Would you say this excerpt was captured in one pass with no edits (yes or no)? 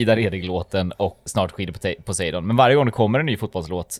no